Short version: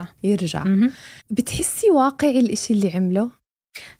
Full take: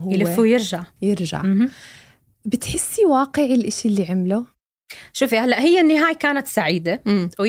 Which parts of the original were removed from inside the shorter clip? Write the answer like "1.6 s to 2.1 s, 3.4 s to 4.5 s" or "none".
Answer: 2.0 s to 2.3 s